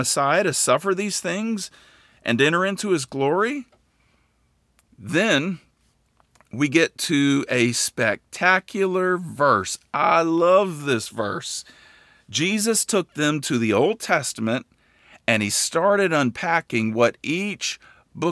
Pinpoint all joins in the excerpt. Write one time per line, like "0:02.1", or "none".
none

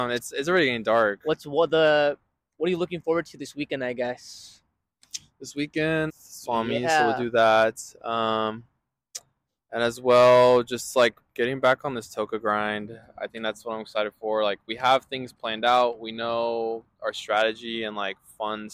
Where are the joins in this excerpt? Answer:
0:06.1

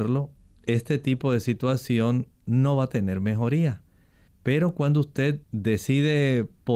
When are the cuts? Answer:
0:05.4

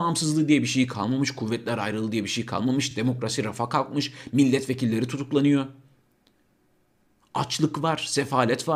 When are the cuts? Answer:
none

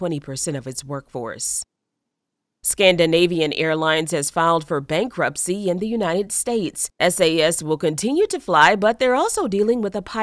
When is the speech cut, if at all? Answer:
none

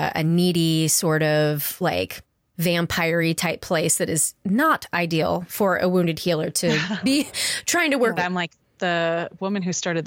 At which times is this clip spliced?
0:08.2

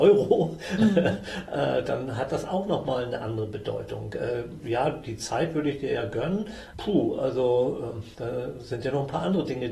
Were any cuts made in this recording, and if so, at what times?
0:06.7
0:08.1

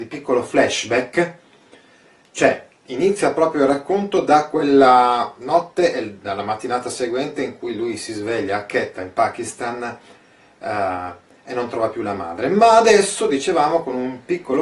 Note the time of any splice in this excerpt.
none

